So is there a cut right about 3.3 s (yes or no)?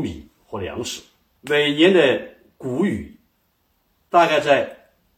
no